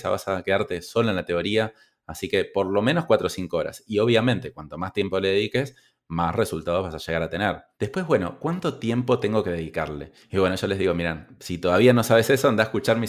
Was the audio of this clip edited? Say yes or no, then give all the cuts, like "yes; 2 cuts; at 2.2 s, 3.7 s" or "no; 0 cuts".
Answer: yes; 2 cuts; at 7.7 s, 10.2 s